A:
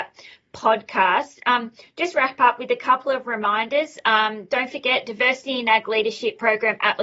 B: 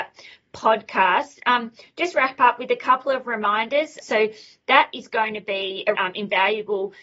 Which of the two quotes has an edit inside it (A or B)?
B